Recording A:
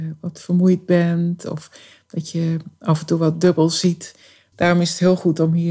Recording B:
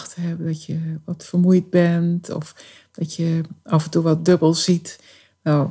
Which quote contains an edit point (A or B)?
A